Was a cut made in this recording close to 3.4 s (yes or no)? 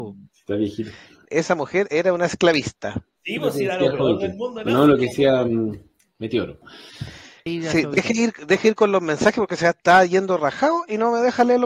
no